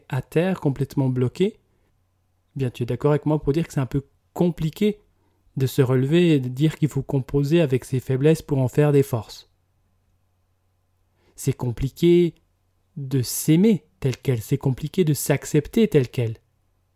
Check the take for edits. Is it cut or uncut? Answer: uncut